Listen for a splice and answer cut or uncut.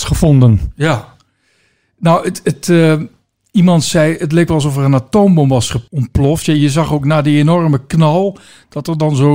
uncut